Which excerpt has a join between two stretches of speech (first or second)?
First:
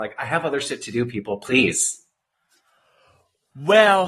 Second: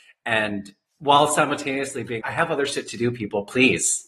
second